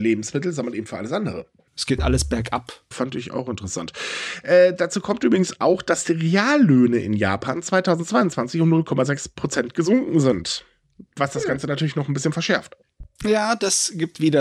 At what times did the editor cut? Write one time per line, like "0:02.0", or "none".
0:01.7
0:02.9